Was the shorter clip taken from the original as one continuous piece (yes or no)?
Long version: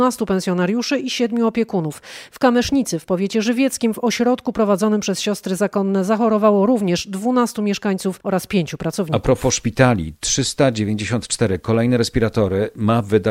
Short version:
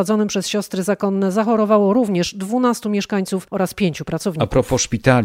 yes